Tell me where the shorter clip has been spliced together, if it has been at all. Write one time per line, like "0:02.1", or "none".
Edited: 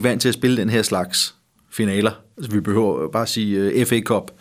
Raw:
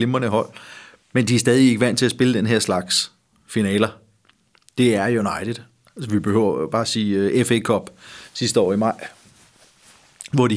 0:02.3